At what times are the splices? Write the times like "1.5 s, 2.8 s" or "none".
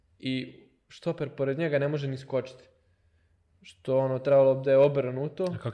none